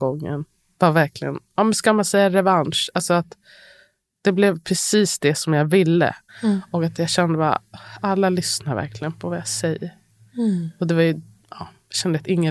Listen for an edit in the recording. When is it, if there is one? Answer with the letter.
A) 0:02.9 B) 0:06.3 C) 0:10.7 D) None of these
B